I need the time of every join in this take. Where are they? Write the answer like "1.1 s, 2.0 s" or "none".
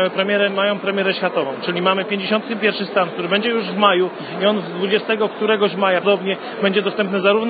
6.0 s